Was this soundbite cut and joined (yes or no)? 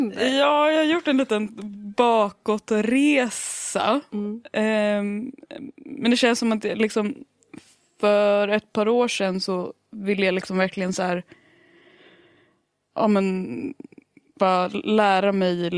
no